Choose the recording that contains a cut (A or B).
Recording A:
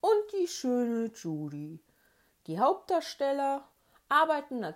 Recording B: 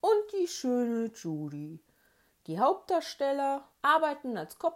B